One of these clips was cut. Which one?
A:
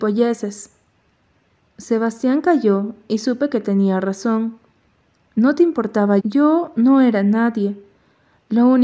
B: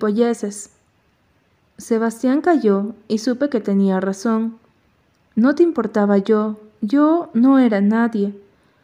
A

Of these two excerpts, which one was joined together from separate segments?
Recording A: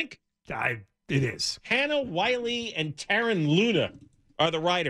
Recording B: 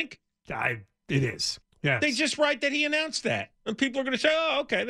B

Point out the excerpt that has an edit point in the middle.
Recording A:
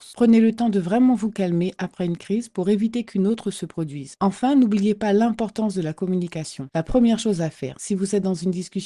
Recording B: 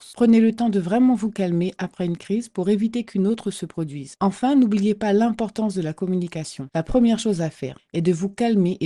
B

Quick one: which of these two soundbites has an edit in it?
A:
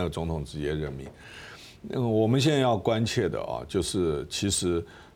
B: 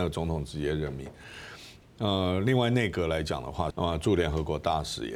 B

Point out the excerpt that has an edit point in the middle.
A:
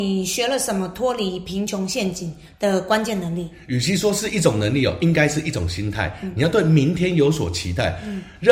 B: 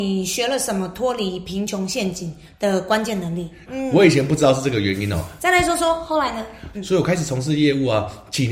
B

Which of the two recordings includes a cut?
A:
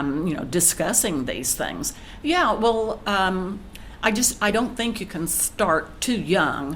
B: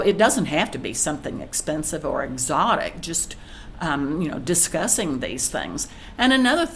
A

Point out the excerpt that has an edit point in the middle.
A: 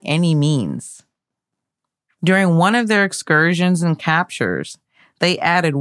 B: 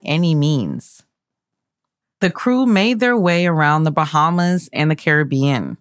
B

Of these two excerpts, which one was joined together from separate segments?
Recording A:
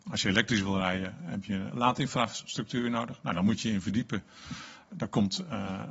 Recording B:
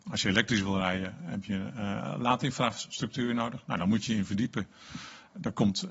A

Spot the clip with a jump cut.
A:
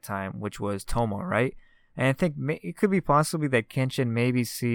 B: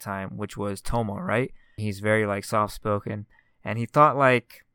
B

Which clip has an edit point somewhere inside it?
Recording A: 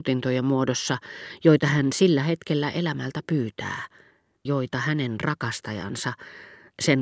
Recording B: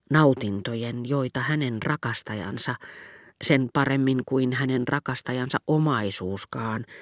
A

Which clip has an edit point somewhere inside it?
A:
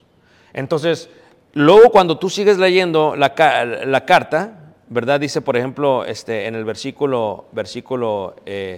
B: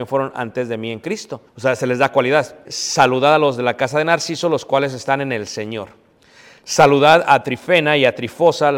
B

